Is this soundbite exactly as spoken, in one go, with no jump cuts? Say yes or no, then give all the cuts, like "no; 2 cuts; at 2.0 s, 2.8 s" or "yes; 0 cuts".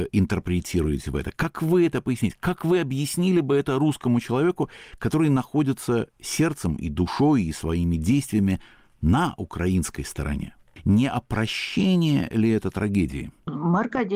yes; 0 cuts